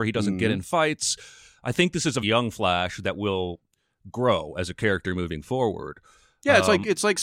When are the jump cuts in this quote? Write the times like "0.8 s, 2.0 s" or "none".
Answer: 2.2 s